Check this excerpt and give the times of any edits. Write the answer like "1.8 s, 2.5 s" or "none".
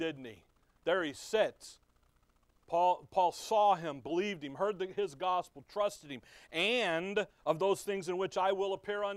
none